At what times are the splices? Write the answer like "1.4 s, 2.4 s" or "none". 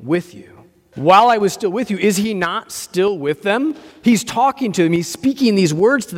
0.9 s